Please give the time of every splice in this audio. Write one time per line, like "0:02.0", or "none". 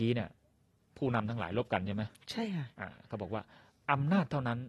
0:02.7